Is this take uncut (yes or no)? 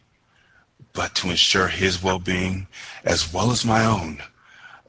yes